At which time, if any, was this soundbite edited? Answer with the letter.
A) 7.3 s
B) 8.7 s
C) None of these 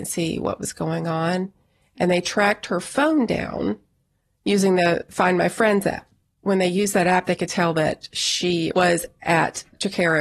B